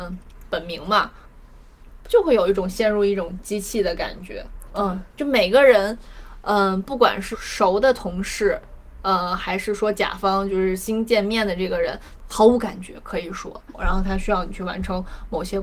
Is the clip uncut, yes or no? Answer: no